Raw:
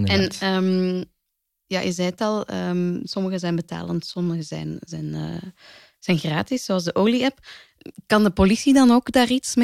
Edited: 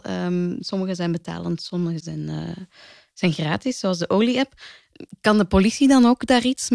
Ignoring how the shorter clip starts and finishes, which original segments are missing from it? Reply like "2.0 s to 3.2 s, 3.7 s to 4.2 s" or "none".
4.4 s to 4.9 s